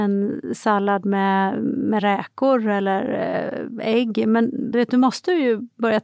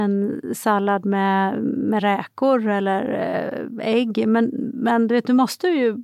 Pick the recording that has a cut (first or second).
first